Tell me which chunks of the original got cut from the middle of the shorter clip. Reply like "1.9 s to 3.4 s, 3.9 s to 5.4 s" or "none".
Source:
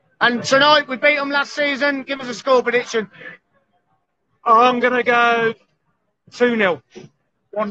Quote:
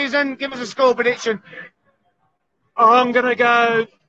none